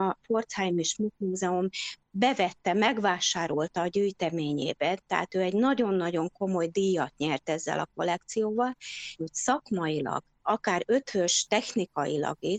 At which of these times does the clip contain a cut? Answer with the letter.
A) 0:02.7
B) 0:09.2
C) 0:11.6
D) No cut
B